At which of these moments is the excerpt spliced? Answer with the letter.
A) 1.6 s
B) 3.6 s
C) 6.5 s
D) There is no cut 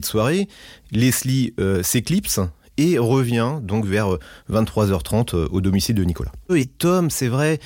C